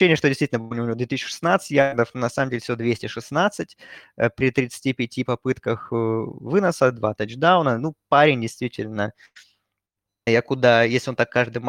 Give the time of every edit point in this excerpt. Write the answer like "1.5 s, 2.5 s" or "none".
10.3 s